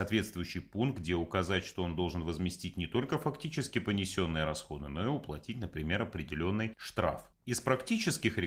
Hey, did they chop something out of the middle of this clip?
yes; 1 cut; at 7.3 s

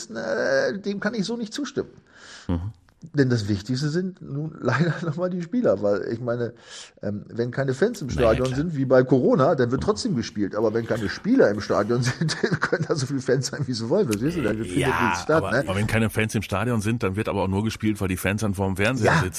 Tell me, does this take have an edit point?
yes; 1 cut; at 15.7 s

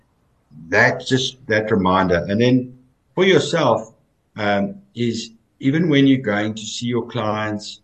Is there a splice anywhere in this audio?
yes; 1 cut; at 3.1 s

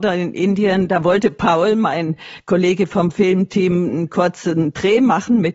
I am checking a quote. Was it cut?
no; 0 cuts

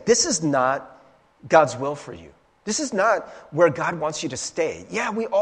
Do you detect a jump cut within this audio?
no; 0 cuts

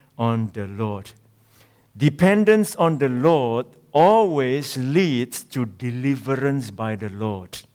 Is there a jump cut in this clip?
no; 0 cuts

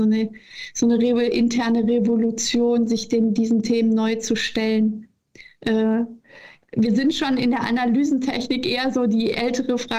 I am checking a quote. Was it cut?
no; 0 cuts

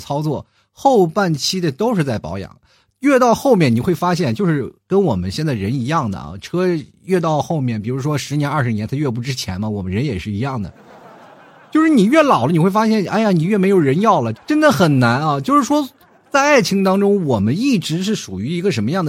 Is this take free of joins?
no; 1 cut; at 14.3 s

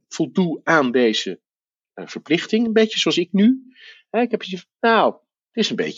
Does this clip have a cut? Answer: no; 0 cuts

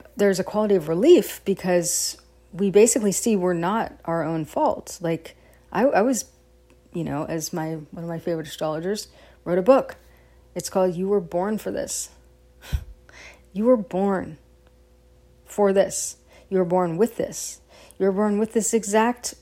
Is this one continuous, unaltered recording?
yes; 0 cuts

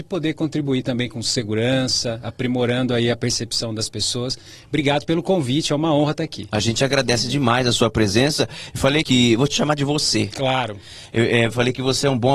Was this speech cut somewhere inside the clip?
yes; 1 cut; at 9.0 s

